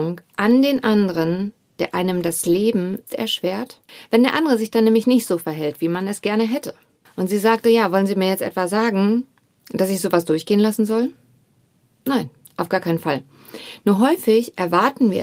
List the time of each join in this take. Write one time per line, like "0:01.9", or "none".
none